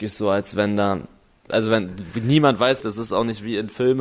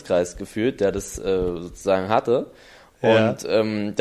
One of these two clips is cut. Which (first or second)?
first